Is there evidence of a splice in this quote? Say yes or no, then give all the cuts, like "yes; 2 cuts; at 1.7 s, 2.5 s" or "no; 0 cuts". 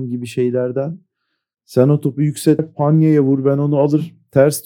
yes; 1 cut; at 2.6 s